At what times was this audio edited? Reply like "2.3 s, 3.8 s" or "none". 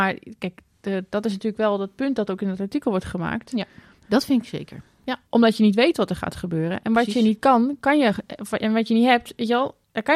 4.0 s, 5.3 s